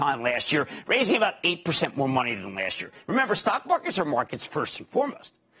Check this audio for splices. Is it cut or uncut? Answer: cut